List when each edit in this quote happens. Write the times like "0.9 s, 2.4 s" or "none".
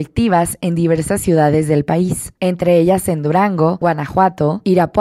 none